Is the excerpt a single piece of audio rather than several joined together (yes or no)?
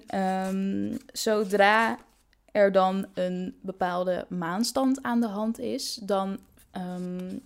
yes